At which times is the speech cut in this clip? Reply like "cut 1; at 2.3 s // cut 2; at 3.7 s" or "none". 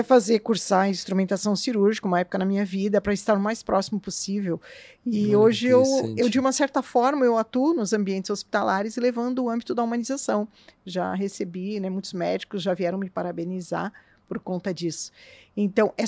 none